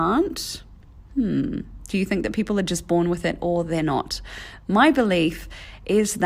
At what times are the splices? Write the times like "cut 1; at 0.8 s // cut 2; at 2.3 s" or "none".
none

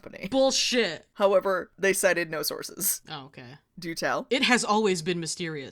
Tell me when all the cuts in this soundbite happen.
cut 1; at 3.7 s

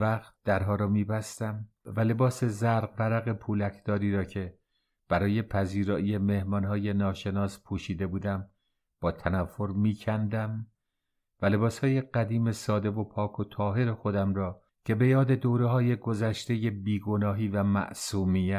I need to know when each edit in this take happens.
none

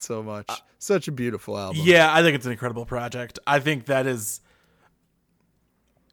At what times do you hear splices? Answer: none

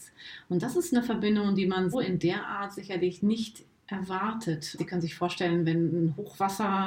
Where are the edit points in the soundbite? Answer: cut 1; at 1.9 s // cut 2; at 4.8 s

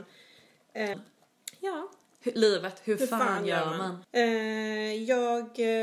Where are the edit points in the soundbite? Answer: cut 1; at 0.9 s // cut 2; at 4.0 s

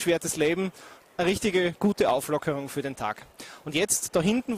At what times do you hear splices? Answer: cut 1; at 1.0 s

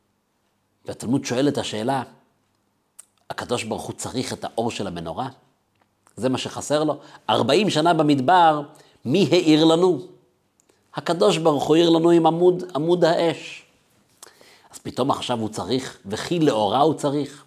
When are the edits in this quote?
none

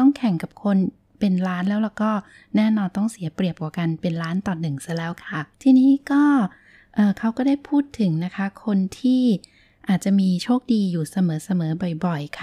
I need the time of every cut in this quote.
cut 1; at 5.5 s

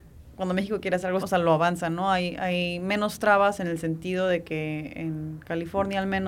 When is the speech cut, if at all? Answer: cut 1; at 1.2 s

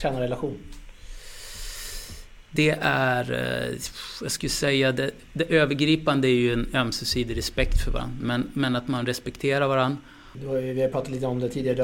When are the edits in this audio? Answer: cut 1; at 8.2 s // cut 2; at 10.3 s

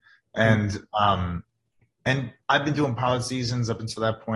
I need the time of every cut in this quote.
none

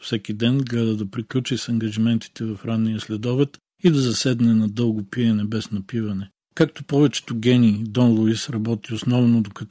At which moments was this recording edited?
none

